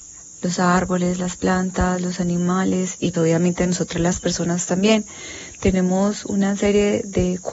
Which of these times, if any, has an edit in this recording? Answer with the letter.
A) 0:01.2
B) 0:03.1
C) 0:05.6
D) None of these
B